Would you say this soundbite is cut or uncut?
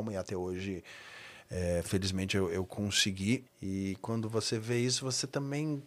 cut